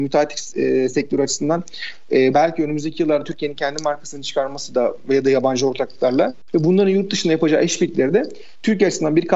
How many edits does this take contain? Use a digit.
1